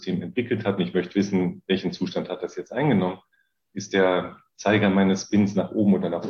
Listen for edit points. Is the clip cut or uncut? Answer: uncut